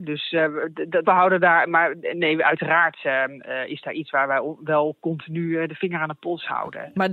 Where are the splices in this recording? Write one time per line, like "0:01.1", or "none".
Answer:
0:01.0